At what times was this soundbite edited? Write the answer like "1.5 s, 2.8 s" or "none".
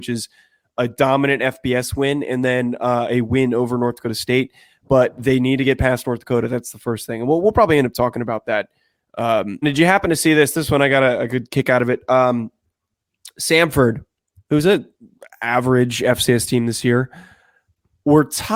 9.6 s